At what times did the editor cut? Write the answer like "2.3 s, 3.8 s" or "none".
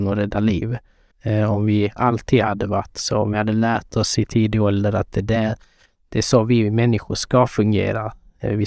1.1 s